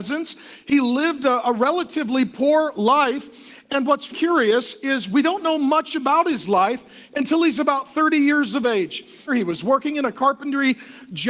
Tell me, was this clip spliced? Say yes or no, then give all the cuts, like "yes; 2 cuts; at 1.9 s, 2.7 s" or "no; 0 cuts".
yes; 2 cuts; at 4.1 s, 9.3 s